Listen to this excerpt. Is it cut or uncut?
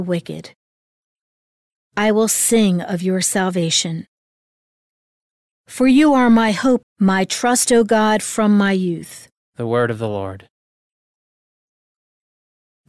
cut